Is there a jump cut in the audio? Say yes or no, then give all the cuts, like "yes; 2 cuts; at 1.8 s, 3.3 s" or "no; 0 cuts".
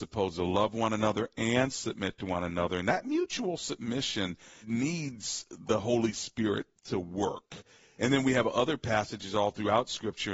yes; 2 cuts; at 4.6 s, 8.0 s